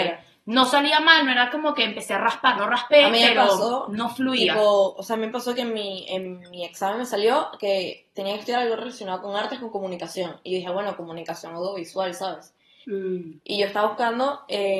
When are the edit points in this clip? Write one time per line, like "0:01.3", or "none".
0:02.6
0:12.8